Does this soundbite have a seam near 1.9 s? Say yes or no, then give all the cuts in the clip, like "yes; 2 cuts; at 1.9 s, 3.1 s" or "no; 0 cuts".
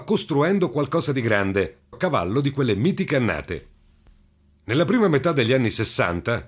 yes; 1 cut; at 1.9 s